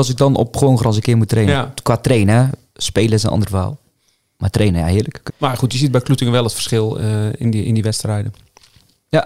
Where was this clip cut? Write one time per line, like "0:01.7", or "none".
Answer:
0:05.3